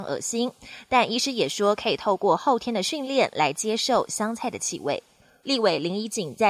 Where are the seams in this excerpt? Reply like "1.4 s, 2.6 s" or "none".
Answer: 5.4 s